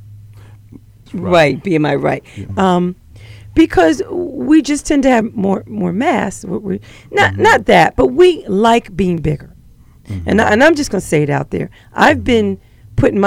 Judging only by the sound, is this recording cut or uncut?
cut